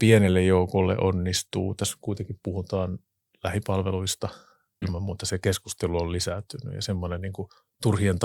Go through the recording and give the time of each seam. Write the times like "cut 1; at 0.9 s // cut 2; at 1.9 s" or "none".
cut 1; at 4.8 s